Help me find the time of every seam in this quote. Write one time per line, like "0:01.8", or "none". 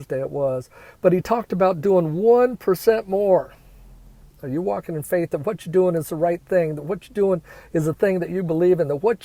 0:04.2